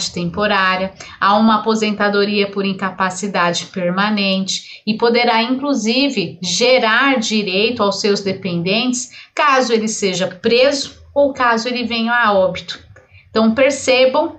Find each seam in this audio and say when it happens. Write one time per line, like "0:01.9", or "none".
none